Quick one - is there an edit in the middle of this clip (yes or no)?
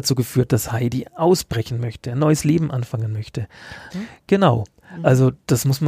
yes